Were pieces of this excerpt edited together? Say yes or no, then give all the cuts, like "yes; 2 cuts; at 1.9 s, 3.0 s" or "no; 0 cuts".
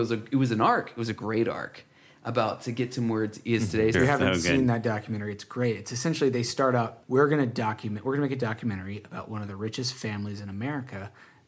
yes; 2 cuts; at 3.9 s, 7.0 s